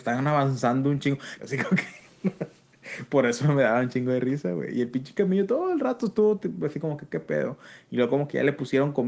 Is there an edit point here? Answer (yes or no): yes